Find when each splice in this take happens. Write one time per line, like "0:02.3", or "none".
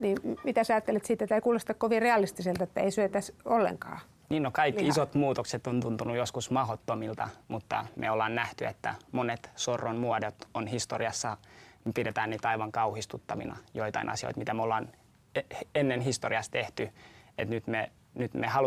none